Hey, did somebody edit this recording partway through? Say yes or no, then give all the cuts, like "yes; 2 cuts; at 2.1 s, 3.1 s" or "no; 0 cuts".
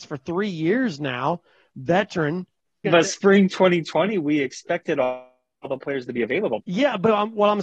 yes; 2 cuts; at 2.8 s, 6.6 s